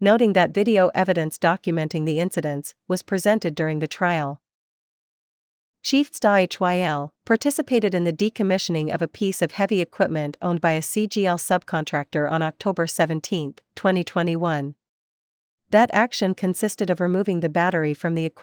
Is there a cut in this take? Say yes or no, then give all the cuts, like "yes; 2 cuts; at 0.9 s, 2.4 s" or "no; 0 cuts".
yes; 1 cut; at 7.2 s